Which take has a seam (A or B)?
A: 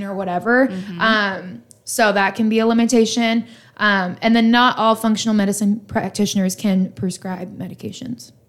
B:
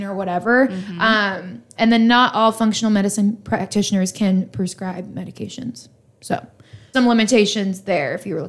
B